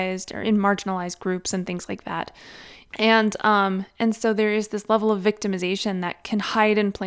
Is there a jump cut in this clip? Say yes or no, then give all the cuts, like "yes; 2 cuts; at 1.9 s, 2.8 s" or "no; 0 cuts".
yes; 1 cut; at 2.9 s